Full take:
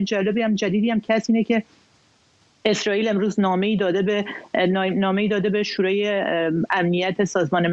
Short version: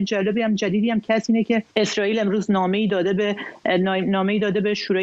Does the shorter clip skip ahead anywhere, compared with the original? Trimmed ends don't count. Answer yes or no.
yes